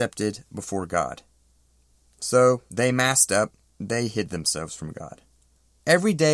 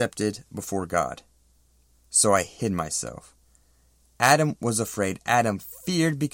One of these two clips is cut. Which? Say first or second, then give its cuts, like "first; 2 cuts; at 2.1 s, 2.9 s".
second; 1 cut; at 1.9 s